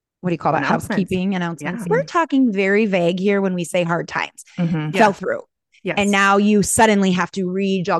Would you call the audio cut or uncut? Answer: cut